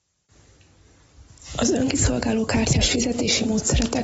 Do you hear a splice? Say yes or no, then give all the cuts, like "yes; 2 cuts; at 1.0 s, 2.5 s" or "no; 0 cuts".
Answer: no; 0 cuts